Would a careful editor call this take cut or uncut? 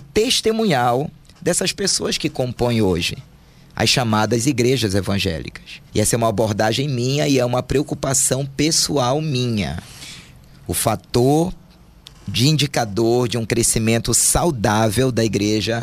cut